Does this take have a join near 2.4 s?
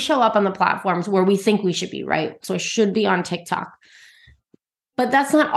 yes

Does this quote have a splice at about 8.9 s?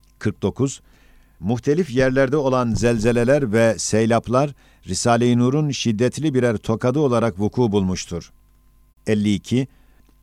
yes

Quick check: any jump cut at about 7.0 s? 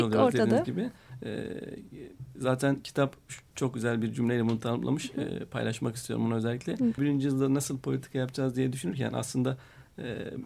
yes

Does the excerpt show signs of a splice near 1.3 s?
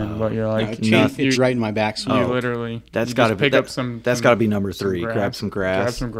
yes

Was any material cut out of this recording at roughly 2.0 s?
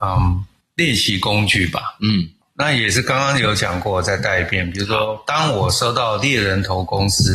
no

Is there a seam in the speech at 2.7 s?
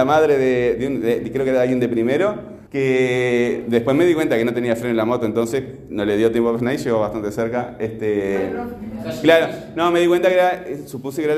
yes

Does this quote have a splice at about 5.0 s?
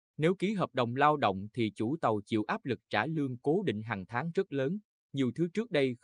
yes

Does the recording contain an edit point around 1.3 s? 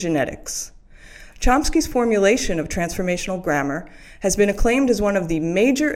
yes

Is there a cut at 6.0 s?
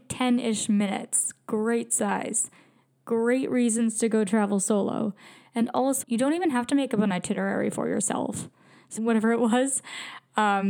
yes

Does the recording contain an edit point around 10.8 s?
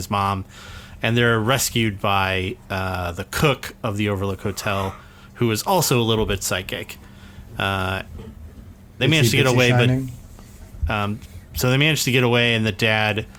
yes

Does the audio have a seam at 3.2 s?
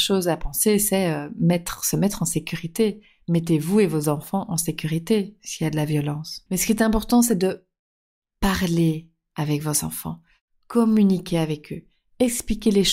no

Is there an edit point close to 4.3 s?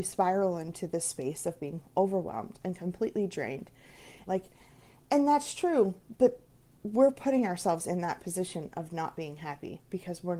yes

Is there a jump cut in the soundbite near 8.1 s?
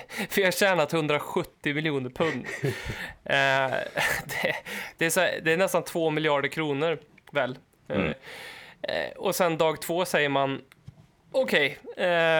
yes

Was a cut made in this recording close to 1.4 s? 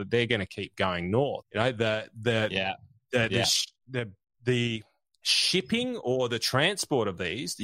yes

